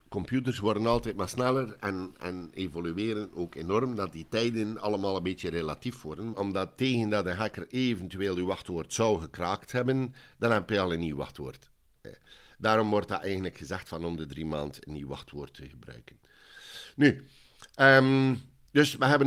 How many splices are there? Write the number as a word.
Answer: one